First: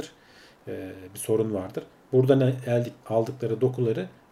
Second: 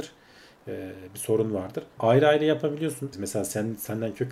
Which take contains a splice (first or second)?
second